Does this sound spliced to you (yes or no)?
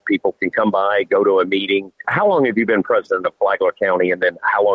yes